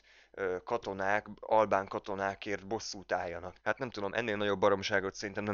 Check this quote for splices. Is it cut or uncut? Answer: cut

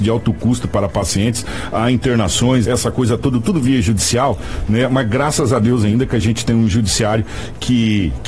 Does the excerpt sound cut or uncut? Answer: cut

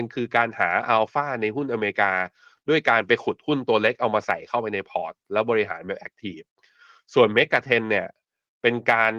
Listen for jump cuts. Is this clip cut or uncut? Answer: uncut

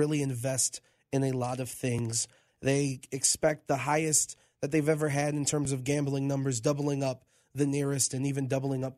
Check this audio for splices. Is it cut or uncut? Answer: cut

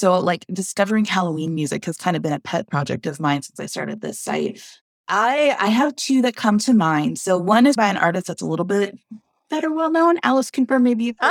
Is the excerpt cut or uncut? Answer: cut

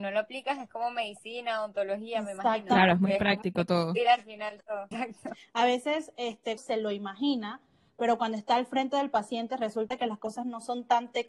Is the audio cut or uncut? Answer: cut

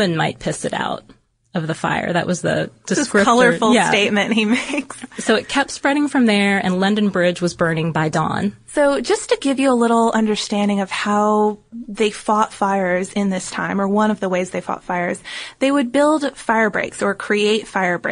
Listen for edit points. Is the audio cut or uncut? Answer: uncut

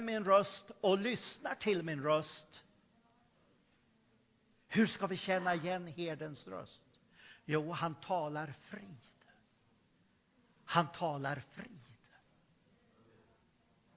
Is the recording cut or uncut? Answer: uncut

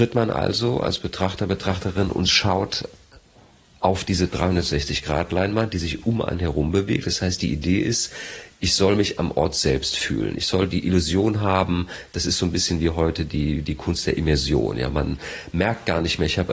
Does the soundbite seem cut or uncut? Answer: uncut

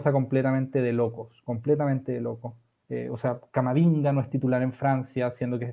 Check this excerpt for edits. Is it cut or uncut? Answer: uncut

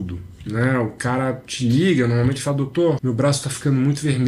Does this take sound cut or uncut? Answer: cut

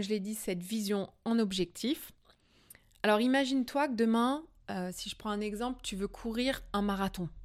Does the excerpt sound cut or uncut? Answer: uncut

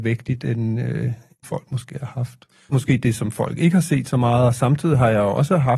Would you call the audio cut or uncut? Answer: cut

